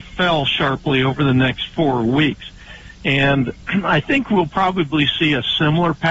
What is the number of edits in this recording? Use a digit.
0